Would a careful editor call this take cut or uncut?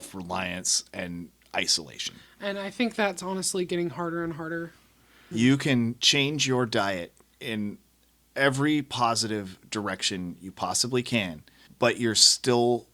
cut